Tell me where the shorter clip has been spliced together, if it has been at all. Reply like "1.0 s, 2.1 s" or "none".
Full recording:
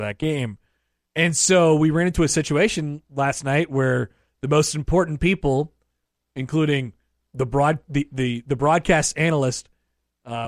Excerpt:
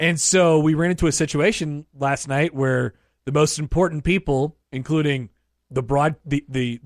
4.6 s

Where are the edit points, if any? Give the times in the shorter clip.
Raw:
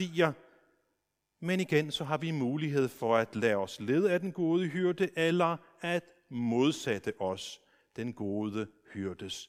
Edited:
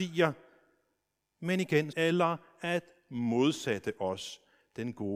1.9 s

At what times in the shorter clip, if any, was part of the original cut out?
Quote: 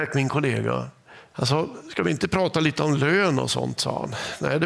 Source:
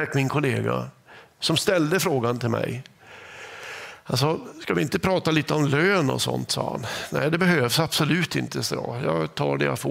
1.3 s

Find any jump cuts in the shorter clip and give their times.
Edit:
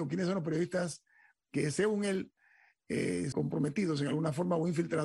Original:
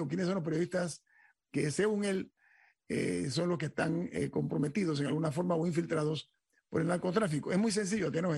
3.3 s

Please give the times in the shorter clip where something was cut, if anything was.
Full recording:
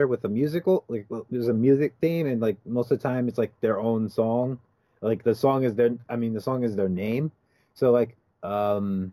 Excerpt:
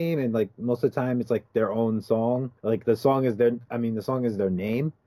2.6 s

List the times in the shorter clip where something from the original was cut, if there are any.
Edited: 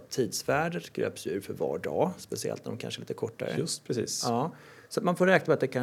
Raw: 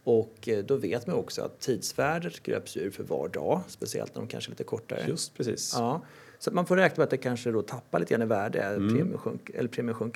none

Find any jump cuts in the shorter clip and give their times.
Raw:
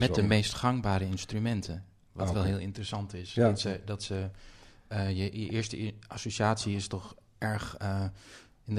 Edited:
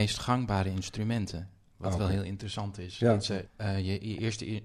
3.5 s

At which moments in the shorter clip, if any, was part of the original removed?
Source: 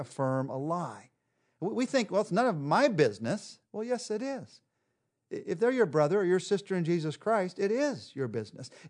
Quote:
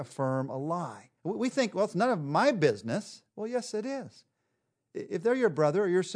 1.2 s

